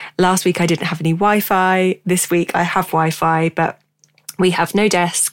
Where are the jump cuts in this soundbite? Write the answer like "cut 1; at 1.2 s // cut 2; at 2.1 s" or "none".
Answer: none